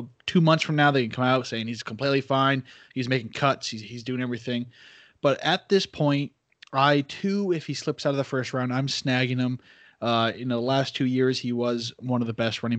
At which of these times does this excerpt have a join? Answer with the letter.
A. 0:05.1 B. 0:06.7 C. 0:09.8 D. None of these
D